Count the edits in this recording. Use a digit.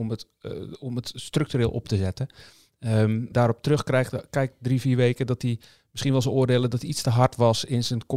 1